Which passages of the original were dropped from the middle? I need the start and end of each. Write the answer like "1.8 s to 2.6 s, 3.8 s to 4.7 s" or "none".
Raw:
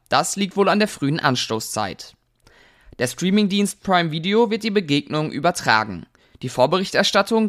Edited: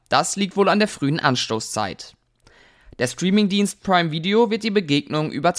none